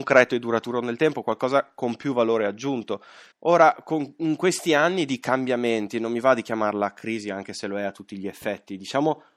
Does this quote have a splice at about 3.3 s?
yes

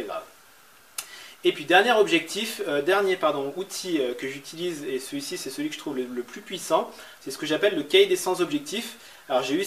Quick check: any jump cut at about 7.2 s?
yes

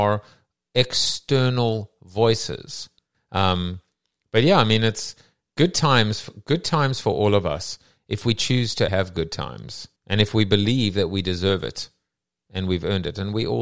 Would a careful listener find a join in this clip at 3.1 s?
yes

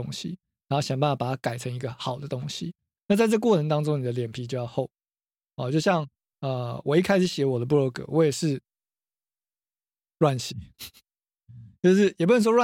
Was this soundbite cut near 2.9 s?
no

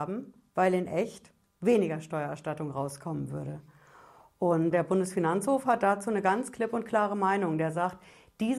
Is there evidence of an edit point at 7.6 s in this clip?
no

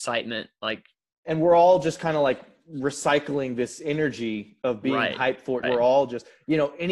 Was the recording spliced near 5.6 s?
yes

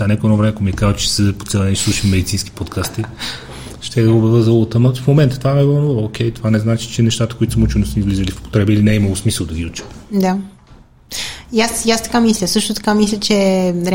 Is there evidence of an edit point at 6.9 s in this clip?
no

